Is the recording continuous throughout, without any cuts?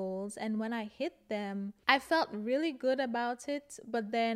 yes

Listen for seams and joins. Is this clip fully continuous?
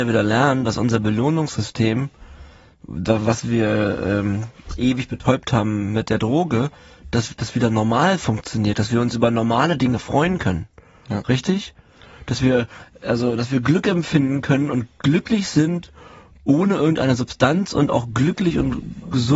yes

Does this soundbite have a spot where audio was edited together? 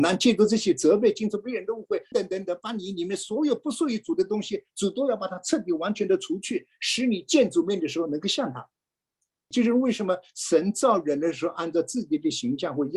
yes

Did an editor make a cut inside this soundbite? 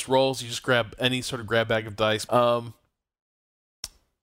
yes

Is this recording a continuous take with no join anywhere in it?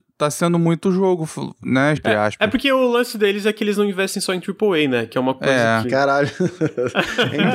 no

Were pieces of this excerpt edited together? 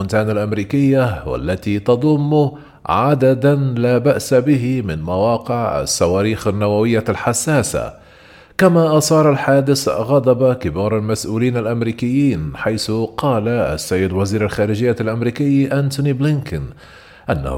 no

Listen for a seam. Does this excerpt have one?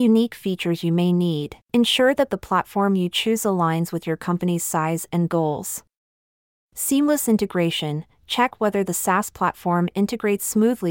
yes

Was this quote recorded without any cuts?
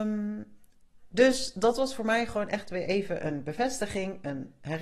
yes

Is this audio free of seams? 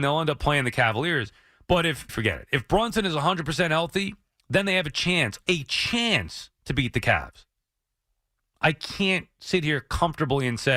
no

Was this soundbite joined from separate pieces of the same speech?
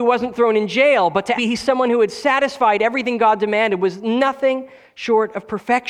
yes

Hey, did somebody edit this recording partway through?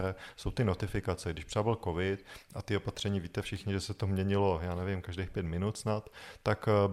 no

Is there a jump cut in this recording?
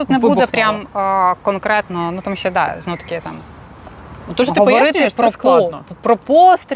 no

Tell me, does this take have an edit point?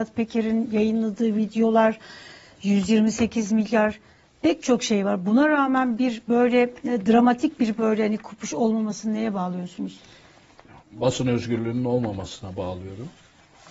no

